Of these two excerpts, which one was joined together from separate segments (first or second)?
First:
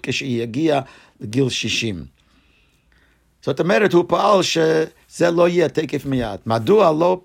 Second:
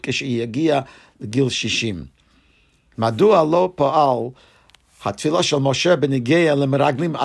second